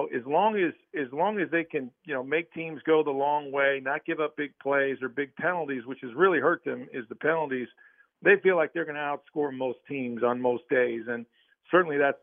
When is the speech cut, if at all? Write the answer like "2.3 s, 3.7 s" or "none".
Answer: none

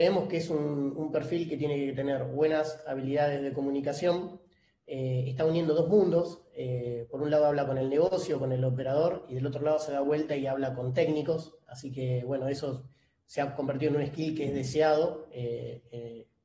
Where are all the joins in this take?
none

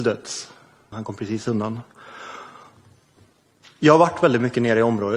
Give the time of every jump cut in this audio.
0.9 s

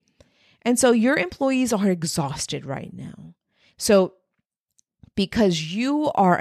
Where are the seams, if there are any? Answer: 3.7 s

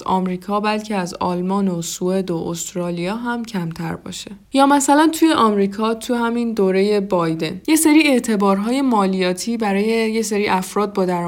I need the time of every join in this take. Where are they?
4.4 s

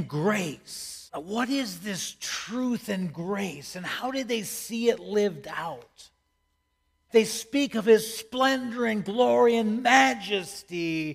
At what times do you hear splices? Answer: 1.1 s, 7.1 s

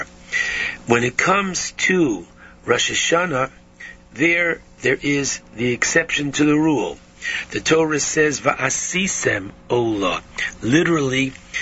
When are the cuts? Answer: none

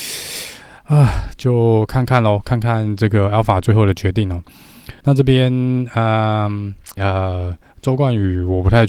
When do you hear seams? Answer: 5.0 s, 7.0 s

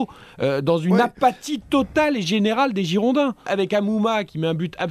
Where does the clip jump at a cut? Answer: 3.5 s

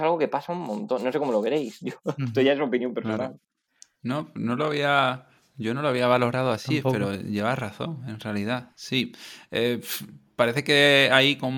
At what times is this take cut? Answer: none

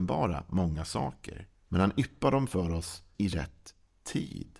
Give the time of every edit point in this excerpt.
1.7 s, 3.1 s

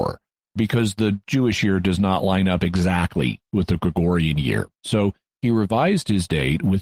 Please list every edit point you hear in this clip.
4.7 s

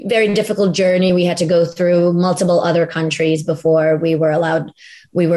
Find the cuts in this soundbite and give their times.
none

